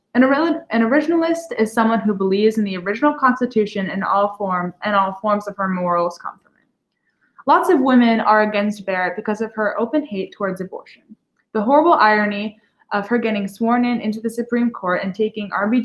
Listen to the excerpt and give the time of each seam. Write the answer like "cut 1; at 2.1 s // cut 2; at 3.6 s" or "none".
cut 1; at 4.8 s